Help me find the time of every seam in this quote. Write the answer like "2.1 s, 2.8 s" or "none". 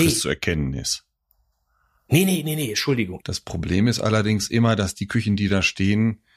3.2 s